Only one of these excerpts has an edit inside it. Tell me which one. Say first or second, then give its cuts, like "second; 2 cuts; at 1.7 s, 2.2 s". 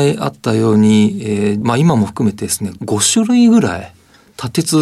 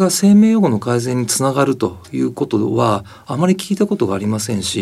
first; 1 cut; at 1.6 s